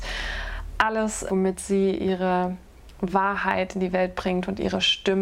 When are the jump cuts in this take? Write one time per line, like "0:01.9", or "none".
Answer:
0:01.3